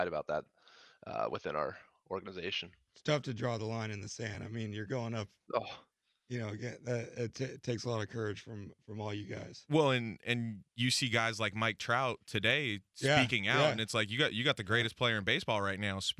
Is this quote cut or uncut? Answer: uncut